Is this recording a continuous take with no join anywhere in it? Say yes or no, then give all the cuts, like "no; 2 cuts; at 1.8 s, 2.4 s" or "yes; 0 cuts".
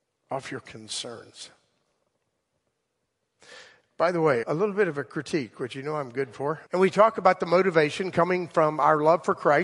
no; 2 cuts; at 4.4 s, 6.7 s